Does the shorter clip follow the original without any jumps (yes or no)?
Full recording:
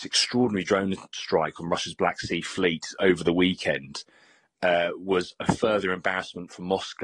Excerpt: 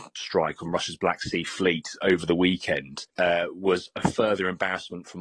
no